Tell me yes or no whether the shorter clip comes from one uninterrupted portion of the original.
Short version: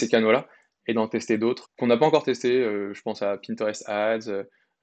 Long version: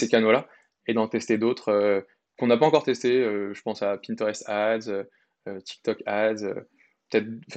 no